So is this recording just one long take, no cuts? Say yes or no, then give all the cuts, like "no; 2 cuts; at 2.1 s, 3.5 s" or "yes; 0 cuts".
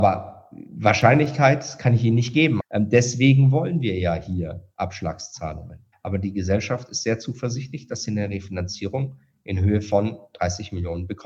no; 2 cuts; at 2.6 s, 5.9 s